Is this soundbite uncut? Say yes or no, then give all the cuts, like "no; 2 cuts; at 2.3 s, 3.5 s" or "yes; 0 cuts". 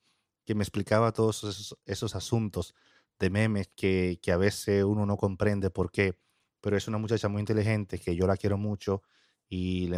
yes; 0 cuts